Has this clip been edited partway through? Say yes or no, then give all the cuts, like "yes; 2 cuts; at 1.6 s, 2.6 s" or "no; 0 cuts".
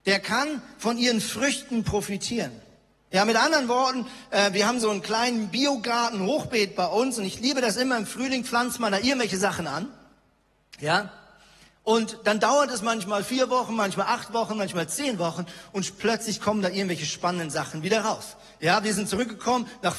no; 0 cuts